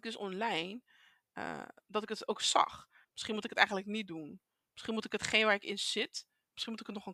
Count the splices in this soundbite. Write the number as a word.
one